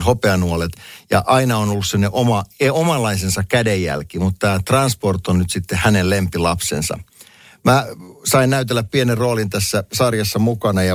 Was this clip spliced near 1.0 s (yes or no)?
no